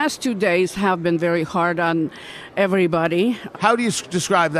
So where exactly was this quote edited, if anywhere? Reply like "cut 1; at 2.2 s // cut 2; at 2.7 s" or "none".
cut 1; at 3.5 s